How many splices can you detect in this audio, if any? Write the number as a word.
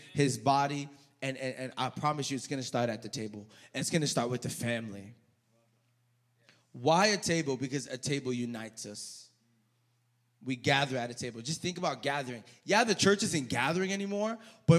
zero